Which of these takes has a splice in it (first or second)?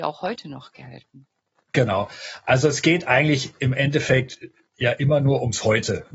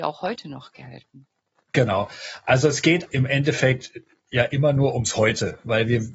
second